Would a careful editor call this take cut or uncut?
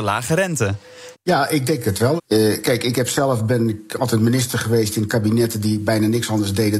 cut